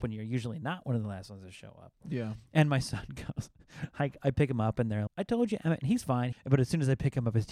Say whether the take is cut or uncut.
cut